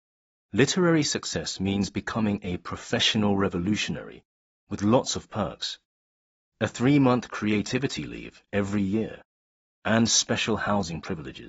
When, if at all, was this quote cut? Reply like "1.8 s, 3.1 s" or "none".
9.7 s